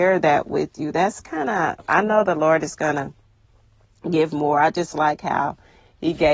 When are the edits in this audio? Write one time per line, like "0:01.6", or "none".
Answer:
none